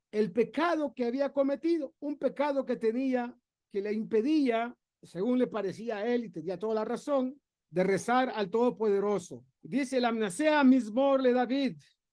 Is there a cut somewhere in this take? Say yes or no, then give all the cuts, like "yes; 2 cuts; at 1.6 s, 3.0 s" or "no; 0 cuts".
yes; 1 cut; at 2.0 s